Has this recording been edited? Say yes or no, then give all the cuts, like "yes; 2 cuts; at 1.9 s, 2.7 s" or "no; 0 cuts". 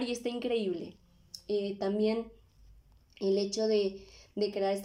no; 0 cuts